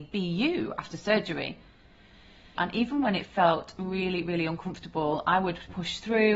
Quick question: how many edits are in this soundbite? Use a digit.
1